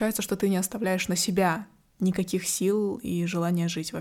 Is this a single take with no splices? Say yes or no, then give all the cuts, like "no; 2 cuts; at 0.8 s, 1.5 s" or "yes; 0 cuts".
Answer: yes; 0 cuts